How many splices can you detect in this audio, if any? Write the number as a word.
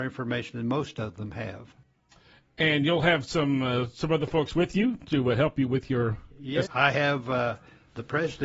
one